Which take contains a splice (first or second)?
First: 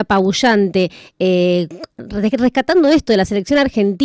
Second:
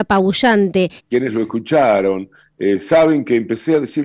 second